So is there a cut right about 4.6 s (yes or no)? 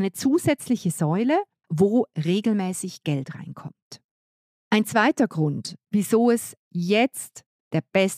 no